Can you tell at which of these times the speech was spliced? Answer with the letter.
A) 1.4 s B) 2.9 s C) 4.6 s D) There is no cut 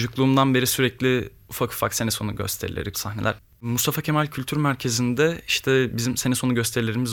B